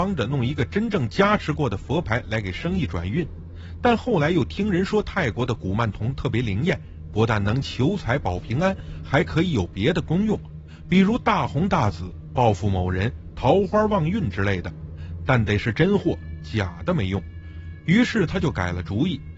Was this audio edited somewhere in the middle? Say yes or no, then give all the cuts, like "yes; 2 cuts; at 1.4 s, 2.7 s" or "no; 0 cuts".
no; 0 cuts